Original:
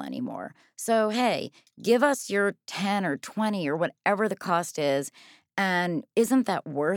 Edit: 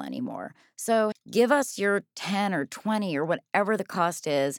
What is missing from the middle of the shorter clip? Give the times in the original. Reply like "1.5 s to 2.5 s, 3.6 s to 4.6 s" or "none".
1.1 s to 1.6 s